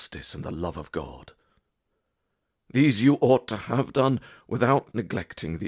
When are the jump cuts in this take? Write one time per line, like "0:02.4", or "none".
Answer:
none